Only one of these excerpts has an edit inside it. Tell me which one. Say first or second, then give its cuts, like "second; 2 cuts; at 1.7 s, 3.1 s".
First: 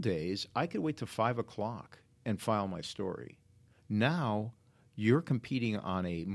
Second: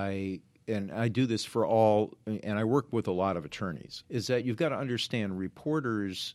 second; 1 cut; at 4.0 s